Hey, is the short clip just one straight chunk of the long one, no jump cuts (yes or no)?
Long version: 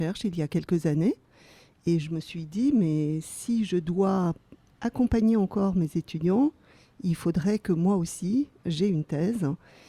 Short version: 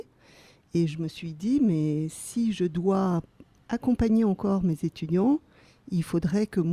yes